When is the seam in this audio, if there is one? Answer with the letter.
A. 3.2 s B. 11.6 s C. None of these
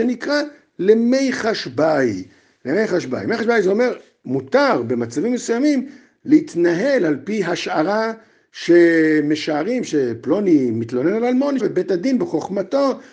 B